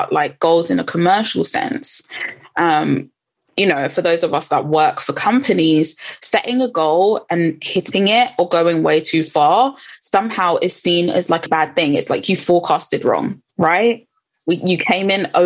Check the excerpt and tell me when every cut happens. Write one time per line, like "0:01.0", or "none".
0:11.5
0:13.5